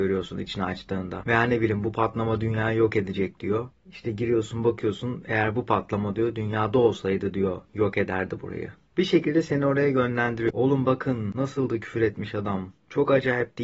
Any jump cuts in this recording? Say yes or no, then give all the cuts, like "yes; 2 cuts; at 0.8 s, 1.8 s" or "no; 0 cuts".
yes; 1 cut; at 10.5 s